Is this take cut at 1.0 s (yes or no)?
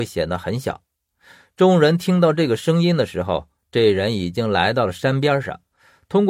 no